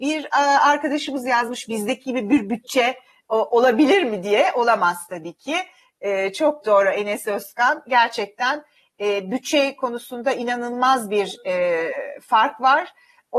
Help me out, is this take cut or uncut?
uncut